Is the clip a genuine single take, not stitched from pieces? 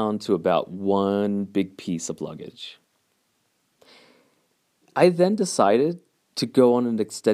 yes; 0 cuts

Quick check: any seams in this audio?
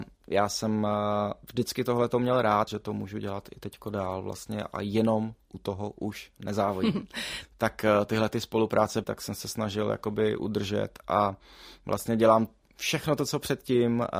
yes; 3 cuts; at 2.7 s, 7.4 s, 9.0 s

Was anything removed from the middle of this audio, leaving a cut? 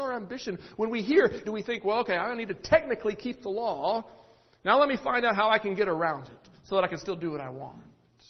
yes; 1 cut; at 1.4 s

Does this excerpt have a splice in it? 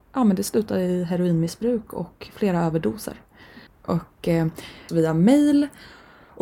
yes; 2 cuts; at 3.7 s, 4.9 s

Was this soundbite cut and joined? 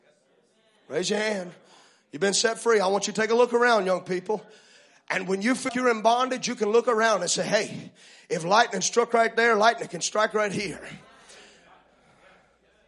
yes; 1 cut; at 5.7 s

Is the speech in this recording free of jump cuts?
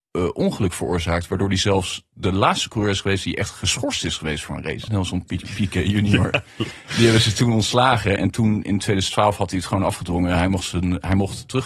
no; 2 cuts; at 4.9 s, 8.2 s

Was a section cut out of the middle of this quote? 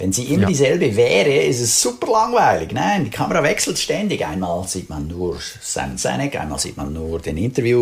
no; 0 cuts

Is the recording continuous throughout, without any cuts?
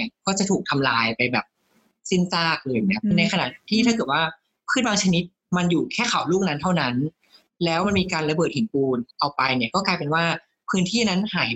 yes; 0 cuts

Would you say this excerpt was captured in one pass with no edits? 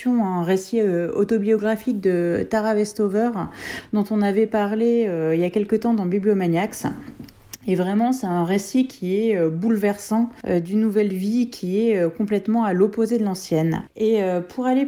yes; 0 cuts

